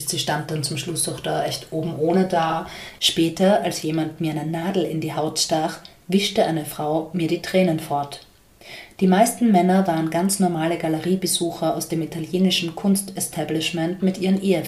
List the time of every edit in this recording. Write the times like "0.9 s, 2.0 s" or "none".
3.0 s

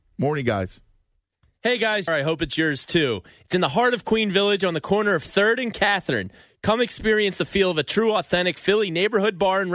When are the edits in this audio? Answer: 2.1 s

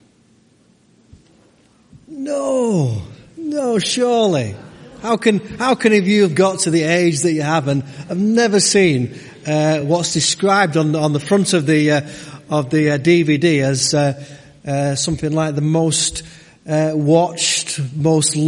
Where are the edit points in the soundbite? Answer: none

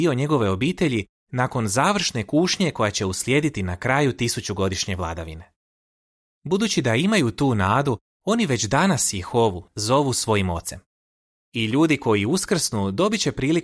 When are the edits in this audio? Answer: 9.7 s

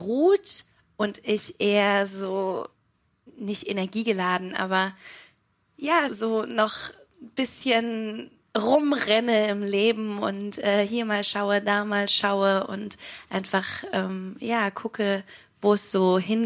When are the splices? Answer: 6.1 s

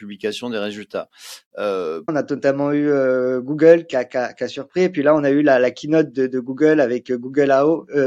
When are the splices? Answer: 2.1 s

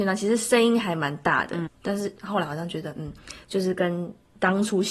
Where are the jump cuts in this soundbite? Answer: 1.7 s

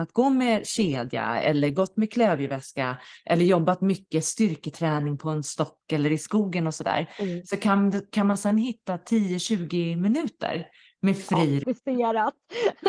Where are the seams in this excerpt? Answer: 11.6 s

